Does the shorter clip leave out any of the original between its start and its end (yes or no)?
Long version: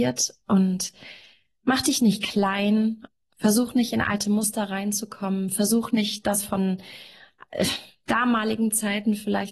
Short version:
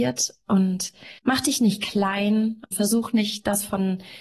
yes